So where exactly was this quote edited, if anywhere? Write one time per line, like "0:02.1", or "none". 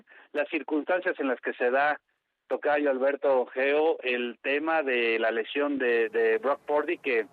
none